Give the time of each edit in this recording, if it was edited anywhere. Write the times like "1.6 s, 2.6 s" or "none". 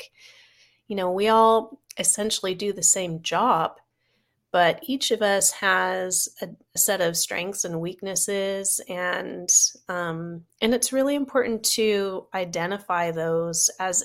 6.8 s